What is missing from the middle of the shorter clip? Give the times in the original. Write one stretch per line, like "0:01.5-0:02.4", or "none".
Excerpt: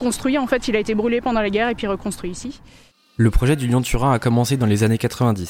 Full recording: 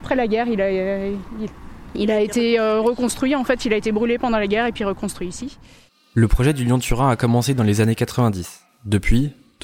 none